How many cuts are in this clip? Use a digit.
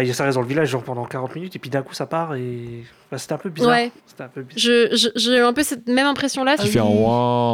2